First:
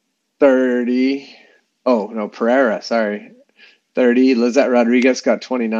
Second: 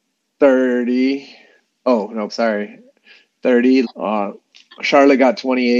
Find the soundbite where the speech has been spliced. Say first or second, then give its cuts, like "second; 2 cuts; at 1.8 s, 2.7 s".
second; 2 cuts; at 2.3 s, 3.8 s